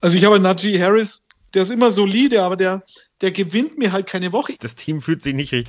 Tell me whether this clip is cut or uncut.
cut